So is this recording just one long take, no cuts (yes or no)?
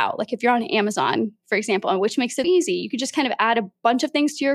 no